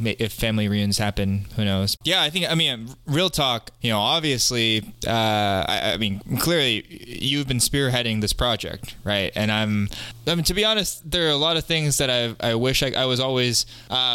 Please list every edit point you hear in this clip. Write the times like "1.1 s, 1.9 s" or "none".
2.0 s, 3.8 s